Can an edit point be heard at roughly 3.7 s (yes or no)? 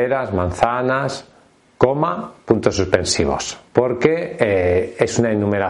yes